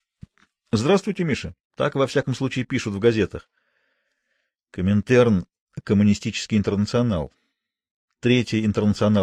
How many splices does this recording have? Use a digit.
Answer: 1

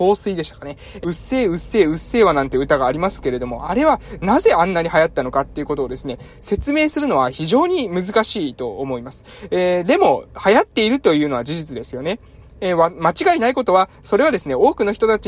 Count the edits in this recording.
1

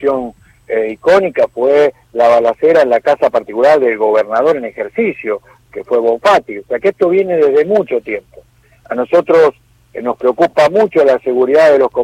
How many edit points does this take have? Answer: 0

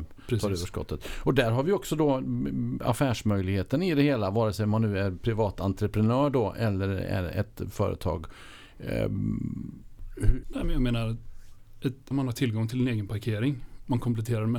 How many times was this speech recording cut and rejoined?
2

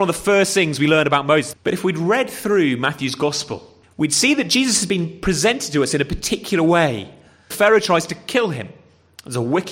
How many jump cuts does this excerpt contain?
3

